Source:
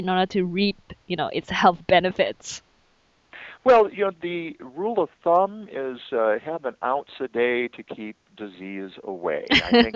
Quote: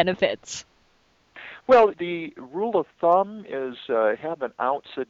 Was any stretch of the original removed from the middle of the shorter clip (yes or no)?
yes